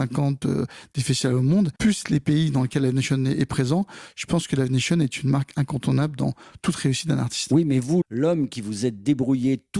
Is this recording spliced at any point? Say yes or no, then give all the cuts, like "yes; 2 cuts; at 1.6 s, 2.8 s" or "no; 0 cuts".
yes; 2 cuts; at 1.8 s, 8.0 s